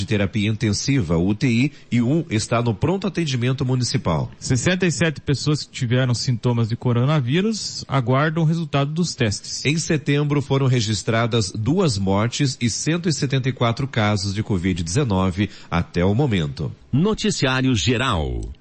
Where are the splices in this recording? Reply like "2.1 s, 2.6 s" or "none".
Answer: none

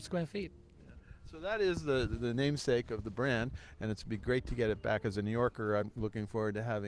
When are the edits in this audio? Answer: 5.8 s

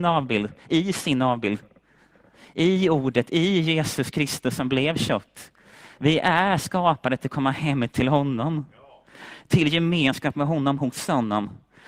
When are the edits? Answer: 6.0 s

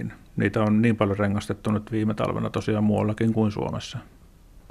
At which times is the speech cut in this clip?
1.9 s

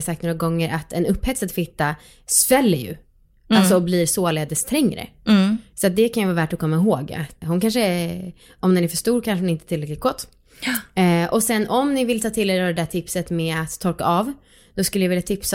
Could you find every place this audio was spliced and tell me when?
7.4 s

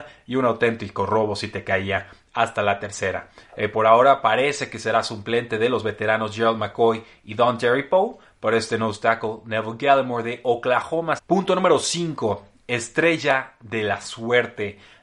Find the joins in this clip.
3.5 s, 11.2 s

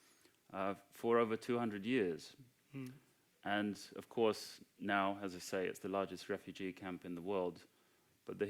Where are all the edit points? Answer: none

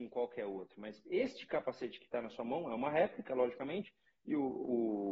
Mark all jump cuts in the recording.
none

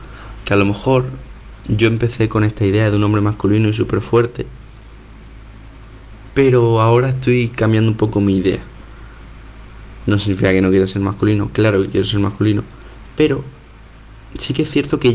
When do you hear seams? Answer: none

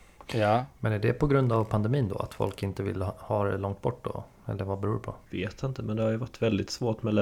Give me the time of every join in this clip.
5.2 s

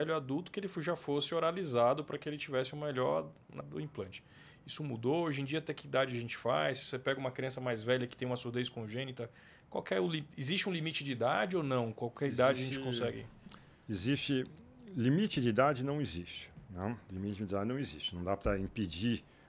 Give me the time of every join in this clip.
3.6 s

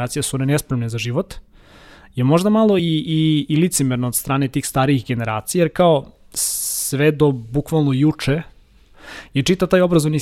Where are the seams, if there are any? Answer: none

